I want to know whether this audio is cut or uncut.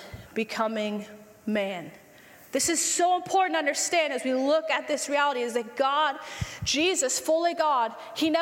uncut